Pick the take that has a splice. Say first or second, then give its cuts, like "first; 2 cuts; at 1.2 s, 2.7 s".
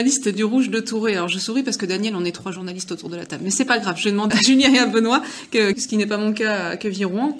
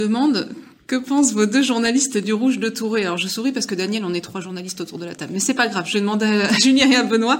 first; 2 cuts; at 4.3 s, 5.7 s